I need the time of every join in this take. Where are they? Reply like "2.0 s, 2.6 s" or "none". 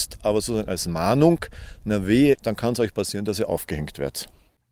2.3 s